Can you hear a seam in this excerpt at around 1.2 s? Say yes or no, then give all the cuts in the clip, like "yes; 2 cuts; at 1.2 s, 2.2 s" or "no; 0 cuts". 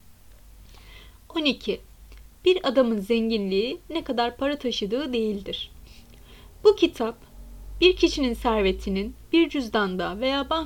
no; 0 cuts